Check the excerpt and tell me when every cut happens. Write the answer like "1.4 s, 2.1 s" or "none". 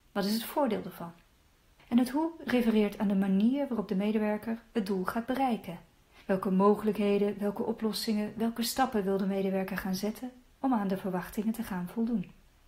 none